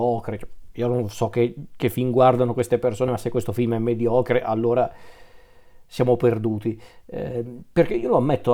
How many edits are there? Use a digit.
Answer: 0